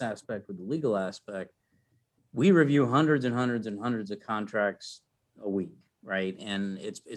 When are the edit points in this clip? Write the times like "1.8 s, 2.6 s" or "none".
none